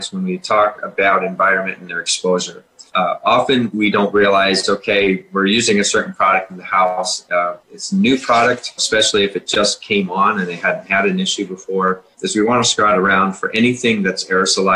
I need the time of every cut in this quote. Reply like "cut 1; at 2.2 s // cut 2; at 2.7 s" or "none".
cut 1; at 2.9 s // cut 2; at 8.8 s // cut 3; at 12.1 s

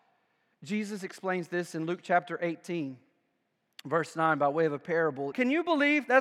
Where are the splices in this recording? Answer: cut 1; at 5.3 s

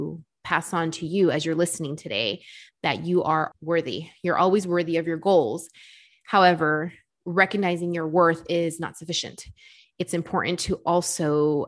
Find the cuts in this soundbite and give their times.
cut 1; at 3.5 s

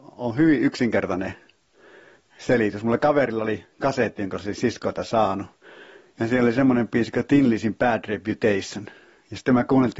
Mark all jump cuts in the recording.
none

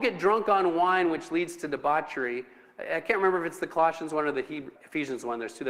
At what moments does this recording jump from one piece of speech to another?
cut 1; at 4.8 s

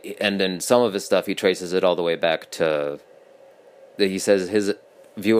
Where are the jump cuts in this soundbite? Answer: none

